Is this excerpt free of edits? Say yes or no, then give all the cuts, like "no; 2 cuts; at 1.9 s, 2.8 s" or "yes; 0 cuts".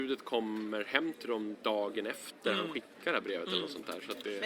yes; 0 cuts